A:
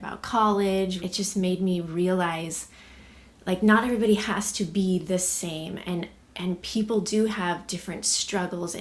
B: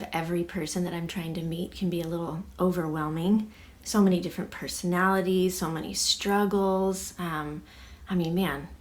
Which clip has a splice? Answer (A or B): A